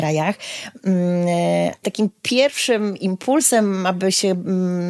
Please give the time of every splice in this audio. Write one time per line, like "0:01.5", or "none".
0:01.8